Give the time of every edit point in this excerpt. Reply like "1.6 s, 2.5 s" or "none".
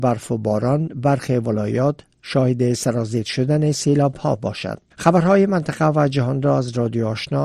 4.9 s